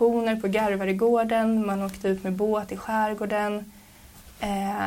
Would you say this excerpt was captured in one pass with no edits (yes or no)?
yes